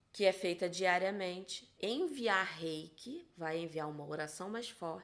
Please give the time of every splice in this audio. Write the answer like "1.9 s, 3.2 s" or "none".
1.8 s